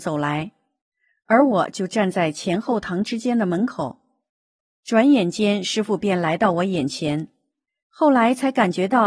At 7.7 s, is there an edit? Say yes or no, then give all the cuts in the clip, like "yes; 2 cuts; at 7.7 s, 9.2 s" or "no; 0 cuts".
yes; 1 cut; at 7.7 s